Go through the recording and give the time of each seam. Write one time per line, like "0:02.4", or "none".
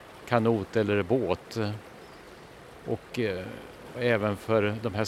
0:03.9